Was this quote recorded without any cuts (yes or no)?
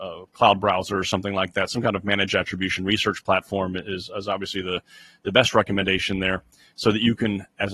yes